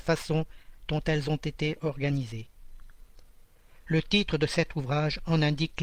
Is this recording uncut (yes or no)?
yes